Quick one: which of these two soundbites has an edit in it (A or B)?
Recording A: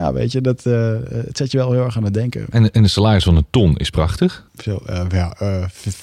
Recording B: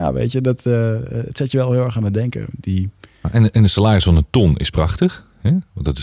A